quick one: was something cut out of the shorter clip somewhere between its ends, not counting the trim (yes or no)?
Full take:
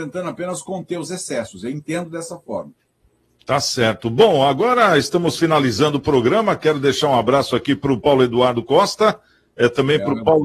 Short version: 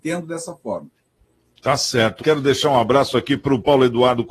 yes